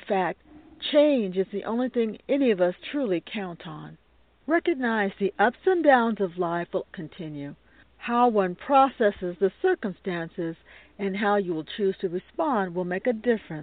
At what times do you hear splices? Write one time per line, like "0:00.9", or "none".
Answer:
0:06.9